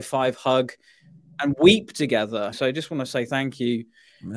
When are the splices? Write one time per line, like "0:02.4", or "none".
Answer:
0:02.5